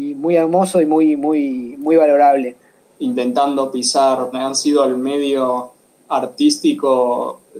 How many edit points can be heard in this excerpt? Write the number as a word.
two